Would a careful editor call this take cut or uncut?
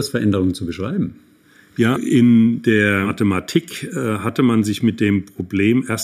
cut